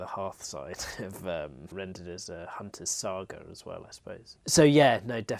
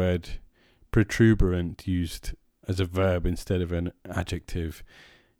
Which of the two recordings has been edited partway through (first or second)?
first